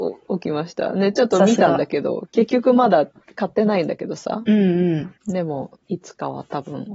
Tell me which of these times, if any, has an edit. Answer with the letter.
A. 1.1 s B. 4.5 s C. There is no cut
C